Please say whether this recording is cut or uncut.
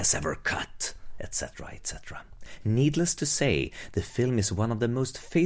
uncut